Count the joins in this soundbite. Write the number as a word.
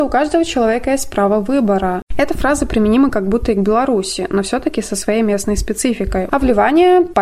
two